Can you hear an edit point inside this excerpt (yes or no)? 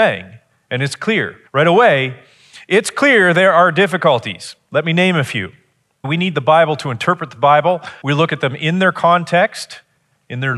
yes